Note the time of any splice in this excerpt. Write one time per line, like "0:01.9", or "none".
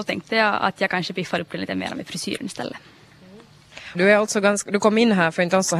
0:03.9